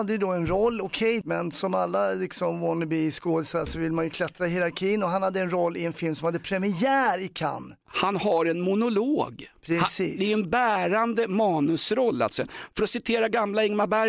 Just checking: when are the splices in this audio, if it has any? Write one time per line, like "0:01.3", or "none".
0:01.2